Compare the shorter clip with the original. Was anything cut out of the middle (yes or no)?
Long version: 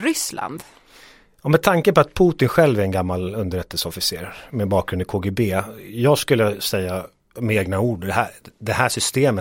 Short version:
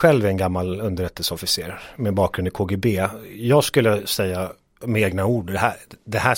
no